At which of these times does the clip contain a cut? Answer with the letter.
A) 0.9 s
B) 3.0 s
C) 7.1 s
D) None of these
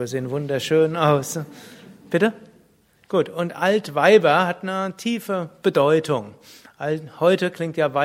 B